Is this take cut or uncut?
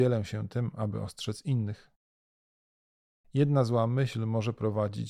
uncut